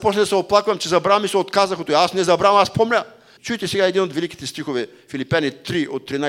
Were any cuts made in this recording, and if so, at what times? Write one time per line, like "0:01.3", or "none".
0:03.4